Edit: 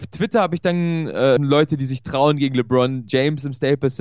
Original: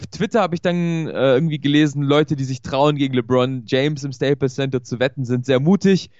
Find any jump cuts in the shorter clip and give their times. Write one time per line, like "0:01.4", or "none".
0:01.4